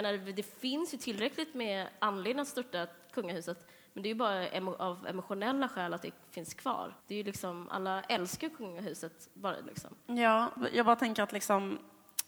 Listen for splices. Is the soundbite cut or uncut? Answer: cut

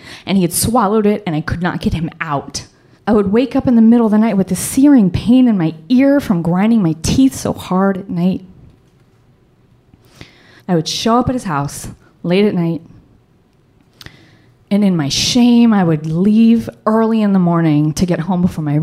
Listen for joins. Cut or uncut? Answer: cut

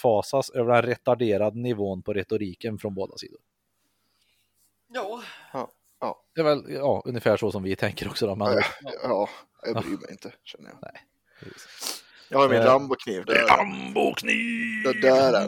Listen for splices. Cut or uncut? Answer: cut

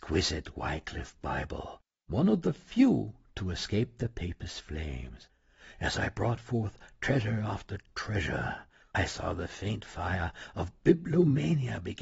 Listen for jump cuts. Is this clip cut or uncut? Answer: uncut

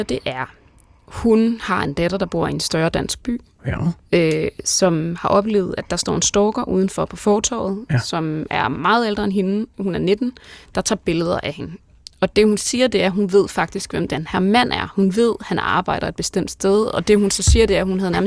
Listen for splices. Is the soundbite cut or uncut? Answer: uncut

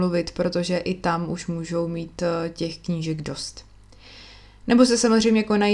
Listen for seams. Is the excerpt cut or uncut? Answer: uncut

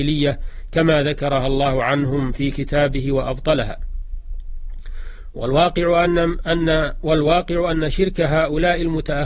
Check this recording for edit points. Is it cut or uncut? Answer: uncut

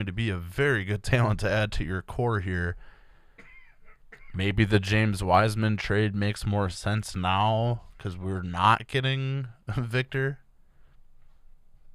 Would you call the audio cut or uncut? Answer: uncut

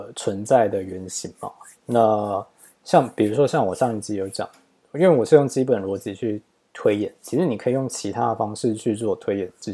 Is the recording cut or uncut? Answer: uncut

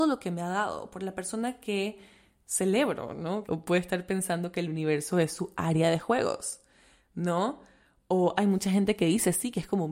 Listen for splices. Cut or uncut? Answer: cut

